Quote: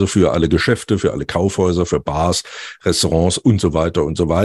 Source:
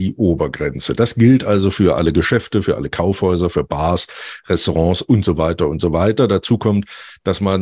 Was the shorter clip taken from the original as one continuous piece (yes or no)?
yes